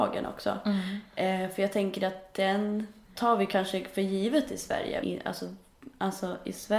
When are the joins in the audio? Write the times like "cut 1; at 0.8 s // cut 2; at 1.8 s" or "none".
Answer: cut 1; at 3.2 s // cut 2; at 5.0 s